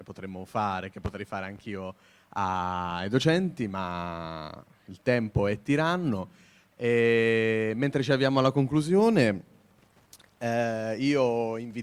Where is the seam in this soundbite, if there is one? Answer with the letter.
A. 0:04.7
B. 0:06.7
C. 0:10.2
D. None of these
A